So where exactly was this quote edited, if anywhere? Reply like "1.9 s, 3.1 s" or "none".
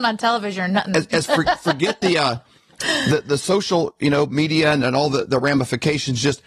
none